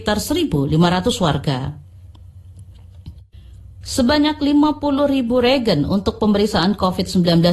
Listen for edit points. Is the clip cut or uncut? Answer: cut